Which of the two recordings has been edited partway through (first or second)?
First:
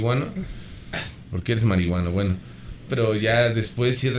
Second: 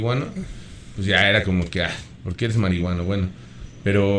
first